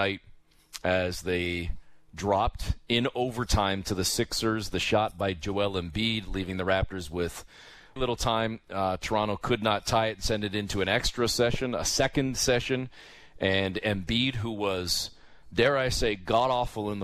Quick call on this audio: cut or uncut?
cut